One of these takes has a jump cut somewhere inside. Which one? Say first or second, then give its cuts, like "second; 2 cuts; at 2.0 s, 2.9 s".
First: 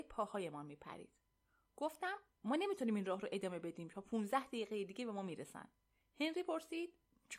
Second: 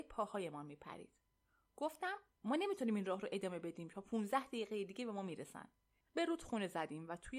second; 1 cut; at 6.0 s